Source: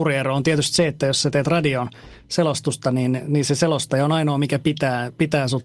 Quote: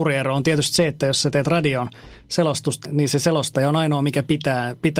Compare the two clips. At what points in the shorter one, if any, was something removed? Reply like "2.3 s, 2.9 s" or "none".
2.8 s